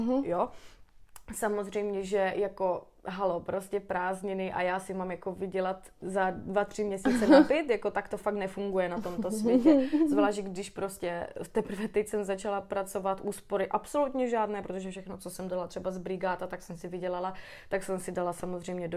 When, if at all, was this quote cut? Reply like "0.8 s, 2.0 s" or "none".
none